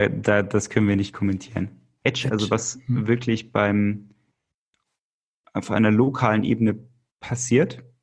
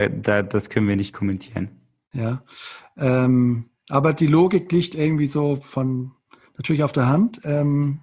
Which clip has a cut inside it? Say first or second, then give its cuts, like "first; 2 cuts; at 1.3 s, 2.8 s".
first; 1 cut; at 2.0 s